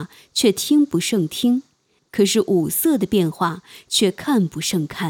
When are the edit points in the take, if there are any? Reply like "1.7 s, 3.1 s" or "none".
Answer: 2.0 s

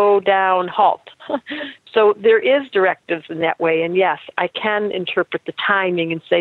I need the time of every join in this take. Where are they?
none

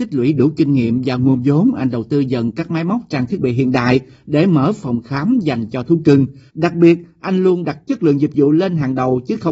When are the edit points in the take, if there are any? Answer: 6.5 s

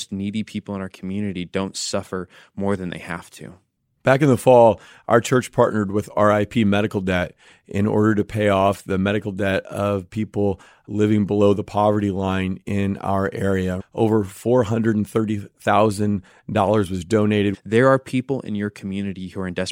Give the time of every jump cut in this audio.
13.8 s, 17.5 s

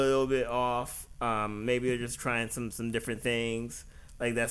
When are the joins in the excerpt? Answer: none

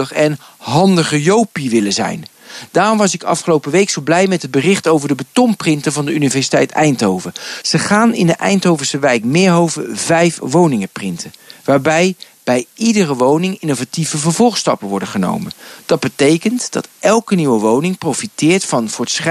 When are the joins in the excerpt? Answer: 7.6 s

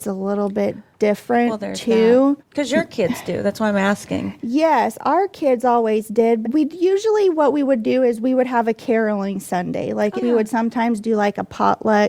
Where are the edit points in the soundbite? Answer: 2.4 s, 6.4 s, 10.2 s

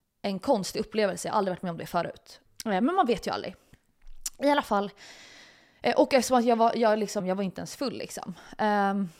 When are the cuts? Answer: 2.5 s, 7.2 s

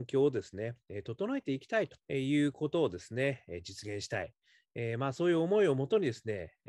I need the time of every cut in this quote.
2.0 s

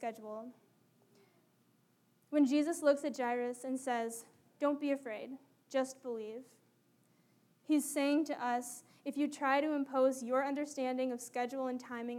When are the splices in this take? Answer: none

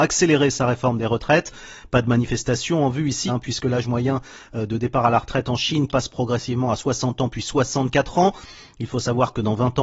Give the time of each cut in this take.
3.3 s, 5.9 s

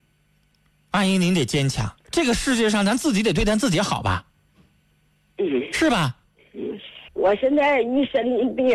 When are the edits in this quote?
2.0 s, 7.1 s

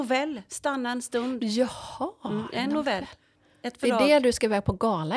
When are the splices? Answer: none

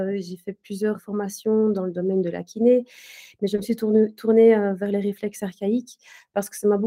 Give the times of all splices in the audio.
1.0 s

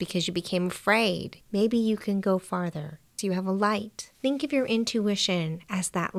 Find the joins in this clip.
1.4 s, 4.1 s

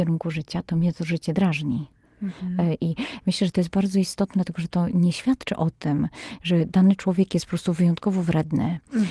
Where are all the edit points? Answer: 2.8 s

